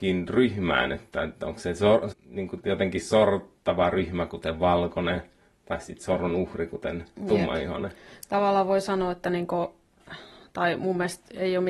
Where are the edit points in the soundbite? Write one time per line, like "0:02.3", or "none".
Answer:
0:02.1